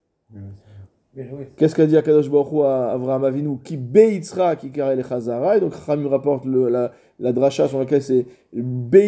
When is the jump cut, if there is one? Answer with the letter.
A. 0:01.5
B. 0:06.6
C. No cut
C